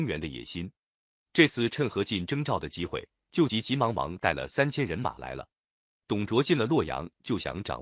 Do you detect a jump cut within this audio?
no; 0 cuts

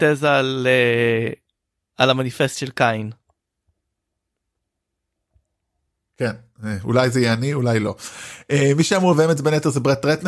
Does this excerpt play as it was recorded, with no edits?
yes; 0 cuts

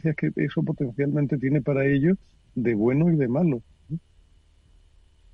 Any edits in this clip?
yes; 1 cut; at 3.9 s

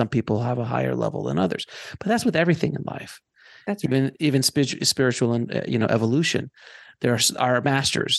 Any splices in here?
no; 0 cuts

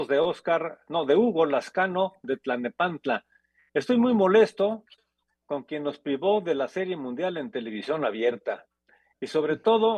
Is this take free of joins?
yes; 0 cuts

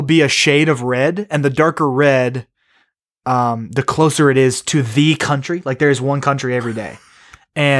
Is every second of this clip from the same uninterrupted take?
yes; 0 cuts

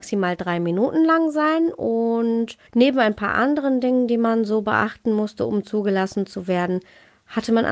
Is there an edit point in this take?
yes; 1 cut; at 2.7 s

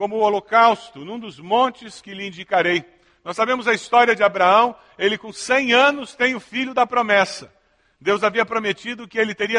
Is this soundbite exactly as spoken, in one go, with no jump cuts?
yes; 0 cuts

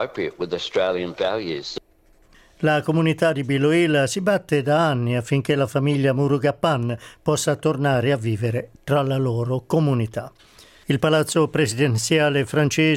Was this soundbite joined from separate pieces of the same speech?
no; 0 cuts

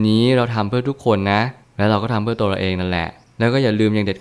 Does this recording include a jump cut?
no; 0 cuts

